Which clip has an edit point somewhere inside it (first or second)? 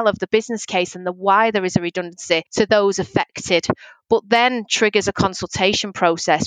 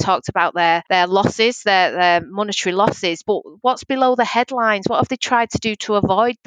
second